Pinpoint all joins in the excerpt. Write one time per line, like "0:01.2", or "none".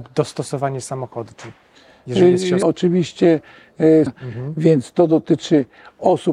0:02.6
0:04.1